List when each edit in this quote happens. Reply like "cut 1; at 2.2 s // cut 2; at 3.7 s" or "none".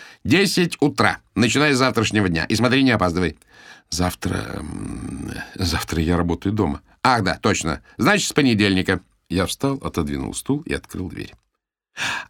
none